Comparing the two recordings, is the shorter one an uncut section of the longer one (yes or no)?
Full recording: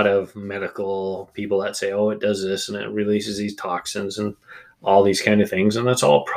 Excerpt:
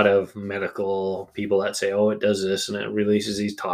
yes